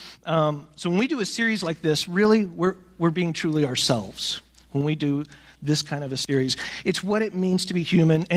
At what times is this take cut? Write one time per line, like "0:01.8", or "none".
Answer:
0:03.0